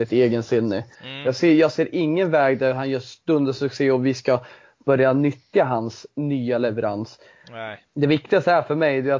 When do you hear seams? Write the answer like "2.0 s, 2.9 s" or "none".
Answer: 0.9 s